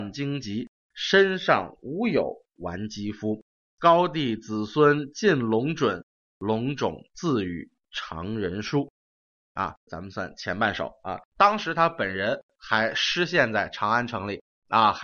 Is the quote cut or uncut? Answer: cut